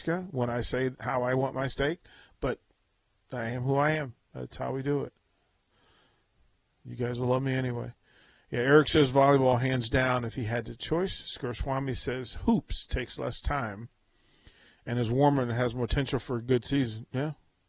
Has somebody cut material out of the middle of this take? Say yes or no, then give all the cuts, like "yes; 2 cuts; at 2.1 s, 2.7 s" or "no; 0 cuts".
no; 0 cuts